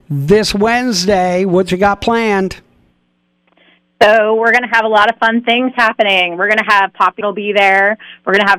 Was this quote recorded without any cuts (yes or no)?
no